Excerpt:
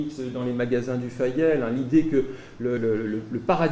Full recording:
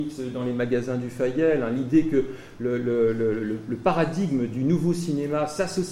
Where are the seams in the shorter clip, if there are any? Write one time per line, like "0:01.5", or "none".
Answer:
0:02.8